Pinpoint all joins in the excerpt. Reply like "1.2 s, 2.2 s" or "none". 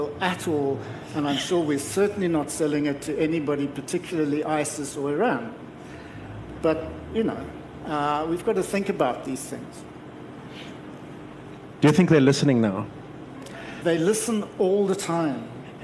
13.8 s